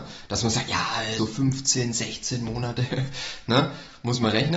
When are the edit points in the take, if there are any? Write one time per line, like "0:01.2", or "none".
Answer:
0:01.2